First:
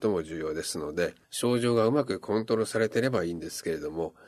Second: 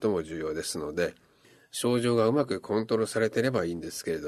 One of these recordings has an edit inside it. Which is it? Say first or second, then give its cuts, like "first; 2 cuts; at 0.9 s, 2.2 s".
first; 1 cut; at 1.2 s